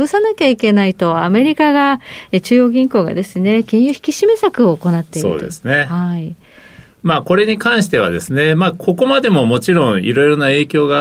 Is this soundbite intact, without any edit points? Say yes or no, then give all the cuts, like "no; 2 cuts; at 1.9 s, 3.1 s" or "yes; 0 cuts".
yes; 0 cuts